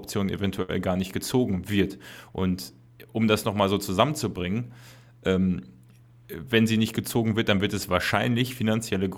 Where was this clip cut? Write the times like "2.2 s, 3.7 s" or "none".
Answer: none